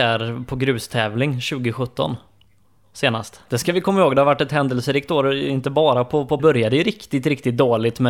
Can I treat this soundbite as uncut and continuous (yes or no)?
no